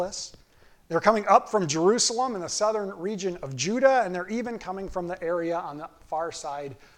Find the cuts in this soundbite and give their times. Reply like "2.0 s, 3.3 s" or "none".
none

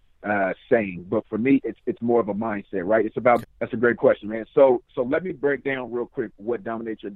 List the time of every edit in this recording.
3.4 s

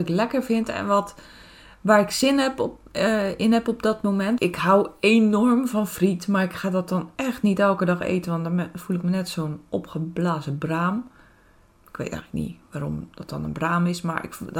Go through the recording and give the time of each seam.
4.4 s

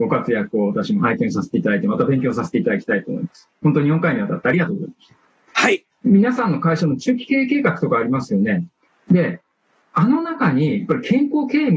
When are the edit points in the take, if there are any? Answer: 5.9 s

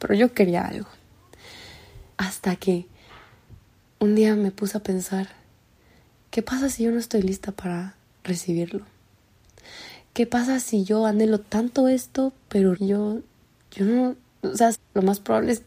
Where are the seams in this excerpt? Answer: 2.1 s, 12.7 s, 14.7 s

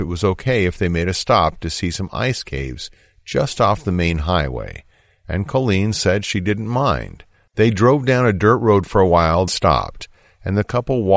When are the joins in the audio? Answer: 7.5 s, 9.5 s

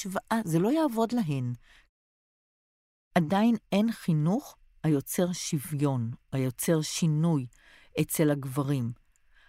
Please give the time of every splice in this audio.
none

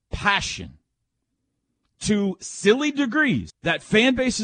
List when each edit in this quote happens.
3.5 s

